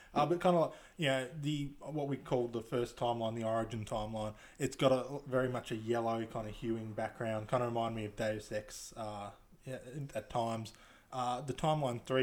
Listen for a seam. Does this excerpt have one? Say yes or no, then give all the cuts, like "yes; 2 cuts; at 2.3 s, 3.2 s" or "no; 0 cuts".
no; 0 cuts